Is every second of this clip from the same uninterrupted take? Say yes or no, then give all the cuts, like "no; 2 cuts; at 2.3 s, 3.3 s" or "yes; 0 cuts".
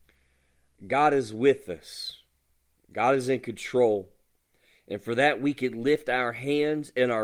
yes; 0 cuts